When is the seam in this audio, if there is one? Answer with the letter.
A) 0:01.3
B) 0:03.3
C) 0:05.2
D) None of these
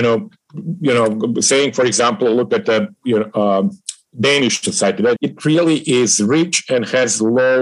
C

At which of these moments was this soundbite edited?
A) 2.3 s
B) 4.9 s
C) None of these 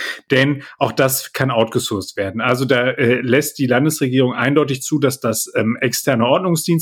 C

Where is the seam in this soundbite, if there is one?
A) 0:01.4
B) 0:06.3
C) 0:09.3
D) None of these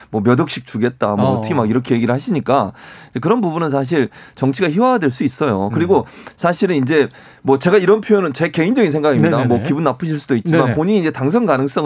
D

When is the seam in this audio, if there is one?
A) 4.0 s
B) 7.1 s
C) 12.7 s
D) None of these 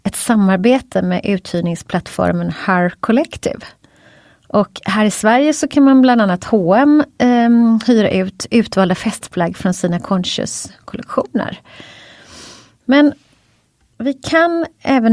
D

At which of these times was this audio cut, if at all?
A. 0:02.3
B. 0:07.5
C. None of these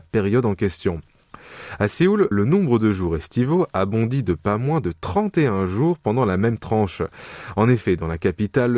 A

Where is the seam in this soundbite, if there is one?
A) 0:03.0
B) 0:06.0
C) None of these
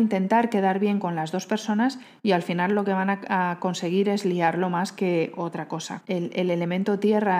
B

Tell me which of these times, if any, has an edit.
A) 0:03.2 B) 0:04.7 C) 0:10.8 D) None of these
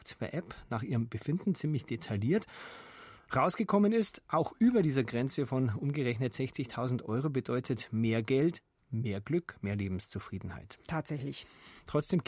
D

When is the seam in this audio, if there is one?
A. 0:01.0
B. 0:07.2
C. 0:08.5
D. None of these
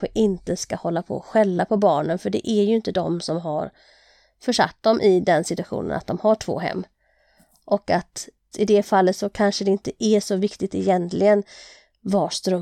C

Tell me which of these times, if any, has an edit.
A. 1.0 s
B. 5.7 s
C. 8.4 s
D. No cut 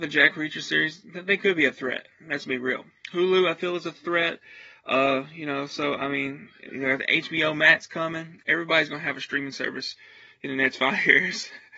C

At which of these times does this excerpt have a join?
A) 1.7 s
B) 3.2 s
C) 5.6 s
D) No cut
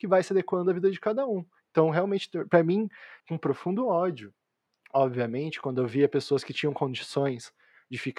B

